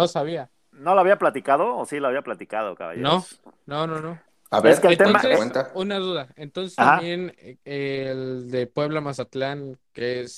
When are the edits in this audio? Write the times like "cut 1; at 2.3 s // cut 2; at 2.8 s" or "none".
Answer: none